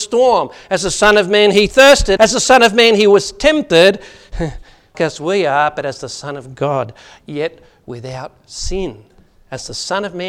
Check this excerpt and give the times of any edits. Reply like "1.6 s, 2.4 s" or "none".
2.2 s, 4.9 s